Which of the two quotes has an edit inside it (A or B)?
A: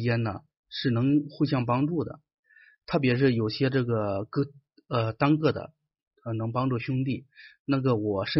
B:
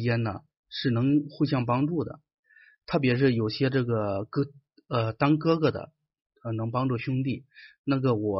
A